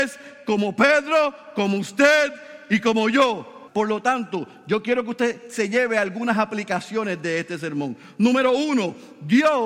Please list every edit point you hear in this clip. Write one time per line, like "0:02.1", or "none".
0:03.7

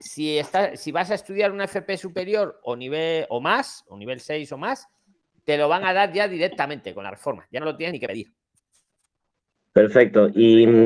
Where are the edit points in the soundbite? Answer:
none

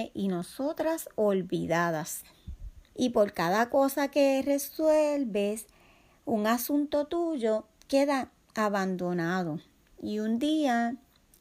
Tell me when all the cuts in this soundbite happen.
0:02.9

